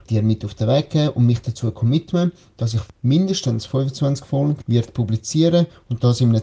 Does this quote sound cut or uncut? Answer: uncut